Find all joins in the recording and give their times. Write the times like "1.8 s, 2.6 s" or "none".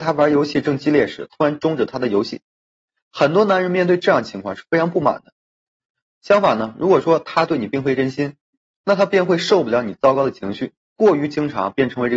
6.0 s, 10.9 s